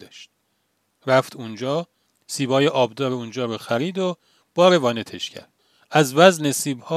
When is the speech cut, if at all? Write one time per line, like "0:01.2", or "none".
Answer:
none